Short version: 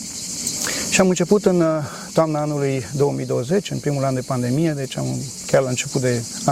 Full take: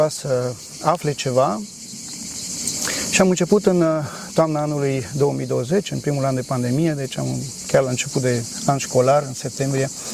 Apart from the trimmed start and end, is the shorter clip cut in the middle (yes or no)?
no